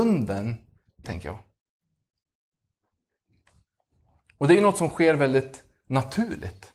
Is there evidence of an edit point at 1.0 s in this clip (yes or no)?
yes